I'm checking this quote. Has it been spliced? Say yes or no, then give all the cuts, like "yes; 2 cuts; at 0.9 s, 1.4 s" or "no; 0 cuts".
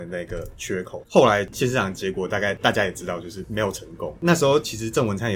yes; 1 cut; at 1.0 s